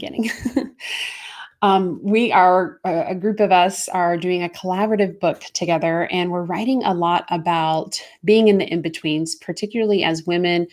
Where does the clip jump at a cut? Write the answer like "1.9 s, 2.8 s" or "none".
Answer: none